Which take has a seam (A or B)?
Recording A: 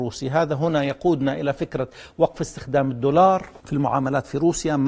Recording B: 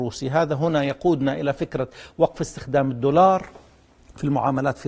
A